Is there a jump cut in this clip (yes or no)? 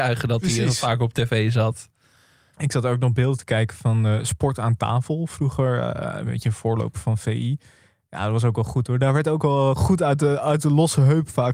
no